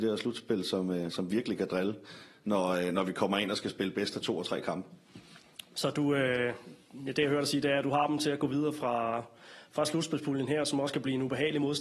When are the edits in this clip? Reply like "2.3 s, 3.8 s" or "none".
none